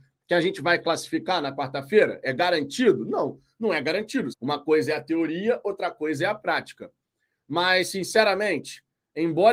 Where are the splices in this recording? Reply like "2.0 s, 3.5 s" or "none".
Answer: 4.3 s